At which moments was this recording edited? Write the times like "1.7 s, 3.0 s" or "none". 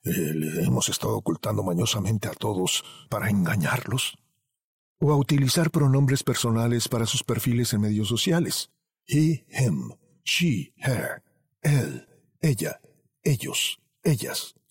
none